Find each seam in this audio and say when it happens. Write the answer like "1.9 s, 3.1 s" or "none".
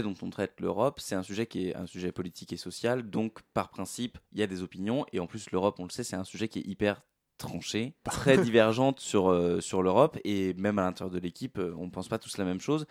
8.0 s